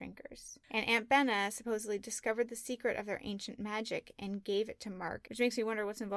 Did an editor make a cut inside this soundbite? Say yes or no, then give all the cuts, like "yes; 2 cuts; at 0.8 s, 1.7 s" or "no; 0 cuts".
yes; 1 cut; at 5.2 s